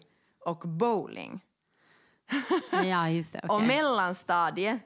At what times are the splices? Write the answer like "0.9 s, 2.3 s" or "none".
none